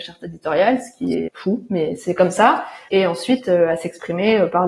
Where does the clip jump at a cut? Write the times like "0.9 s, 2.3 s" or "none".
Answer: 1.3 s, 2.9 s